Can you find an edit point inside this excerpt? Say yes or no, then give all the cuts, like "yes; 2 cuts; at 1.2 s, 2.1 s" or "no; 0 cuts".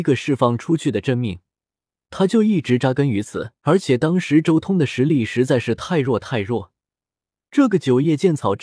yes; 2 cuts; at 2.0 s, 3.6 s